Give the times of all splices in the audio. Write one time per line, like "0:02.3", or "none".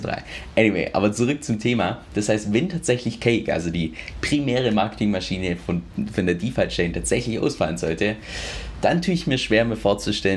none